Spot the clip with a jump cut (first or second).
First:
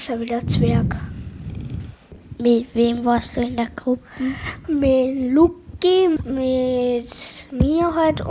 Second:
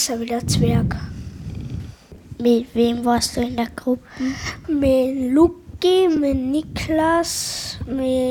first